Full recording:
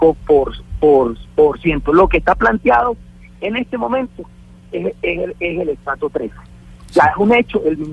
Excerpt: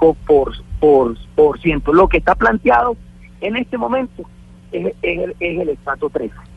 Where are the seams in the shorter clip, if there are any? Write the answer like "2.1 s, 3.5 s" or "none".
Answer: none